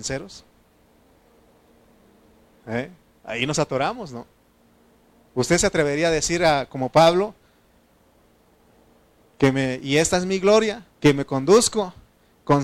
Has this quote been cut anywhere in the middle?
yes; 2 cuts; at 9.3 s, 10.9 s

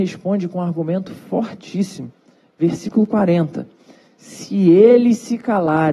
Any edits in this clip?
no; 0 cuts

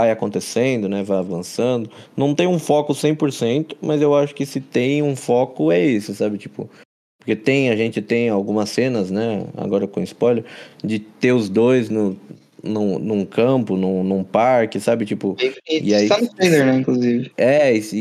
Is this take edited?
no; 0 cuts

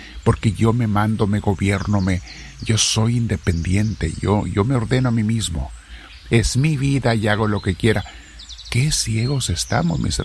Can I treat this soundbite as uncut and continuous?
yes; 0 cuts

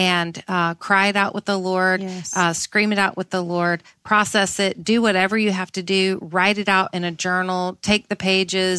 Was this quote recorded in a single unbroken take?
yes; 0 cuts

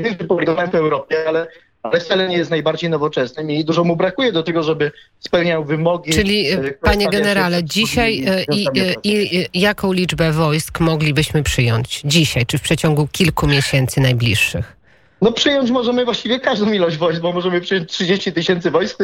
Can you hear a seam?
no; 0 cuts

